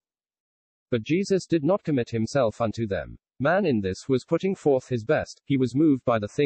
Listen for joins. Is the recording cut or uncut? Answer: uncut